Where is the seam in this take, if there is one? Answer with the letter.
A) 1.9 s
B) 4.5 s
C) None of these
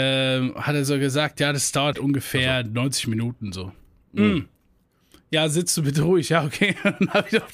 A